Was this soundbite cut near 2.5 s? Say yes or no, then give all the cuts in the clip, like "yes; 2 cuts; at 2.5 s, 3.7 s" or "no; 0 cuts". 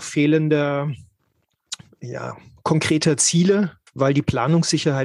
no; 1 cut; at 3.9 s